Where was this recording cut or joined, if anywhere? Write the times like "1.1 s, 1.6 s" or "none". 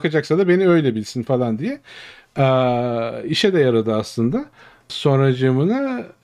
4.9 s